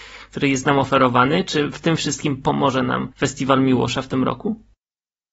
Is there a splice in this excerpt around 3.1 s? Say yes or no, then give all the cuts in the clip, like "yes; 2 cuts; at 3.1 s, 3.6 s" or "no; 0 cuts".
yes; 1 cut; at 3.1 s